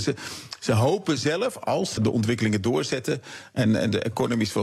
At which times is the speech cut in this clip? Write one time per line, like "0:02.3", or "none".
0:02.0